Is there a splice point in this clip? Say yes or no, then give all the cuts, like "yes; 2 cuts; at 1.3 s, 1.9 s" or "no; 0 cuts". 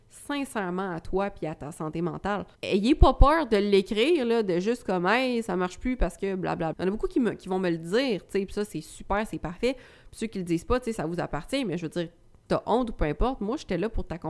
yes; 3 cuts; at 2.5 s, 6.7 s, 12.5 s